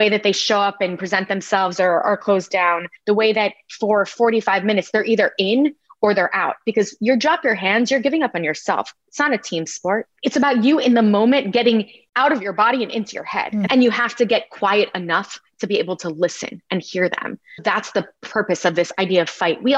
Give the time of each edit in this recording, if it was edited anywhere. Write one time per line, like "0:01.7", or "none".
0:03.0
0:13.7
0:17.6